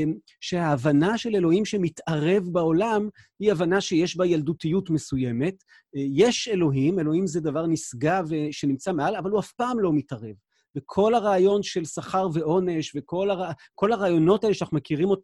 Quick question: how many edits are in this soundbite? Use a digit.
0